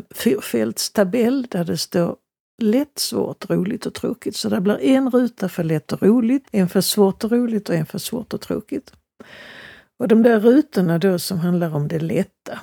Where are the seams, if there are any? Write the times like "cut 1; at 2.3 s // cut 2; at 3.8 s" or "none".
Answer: cut 1; at 6.4 s